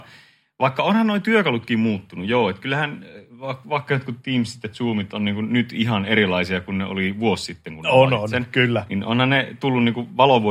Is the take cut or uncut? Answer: uncut